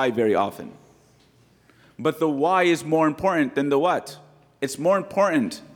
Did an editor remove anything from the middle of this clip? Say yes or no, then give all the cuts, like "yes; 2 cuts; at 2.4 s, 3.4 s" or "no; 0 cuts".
no; 0 cuts